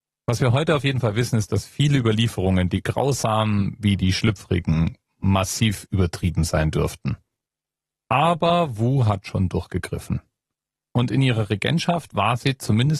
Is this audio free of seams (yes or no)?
yes